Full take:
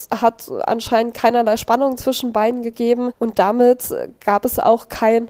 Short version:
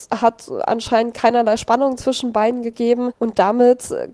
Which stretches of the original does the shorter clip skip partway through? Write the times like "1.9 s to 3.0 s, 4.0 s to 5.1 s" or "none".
none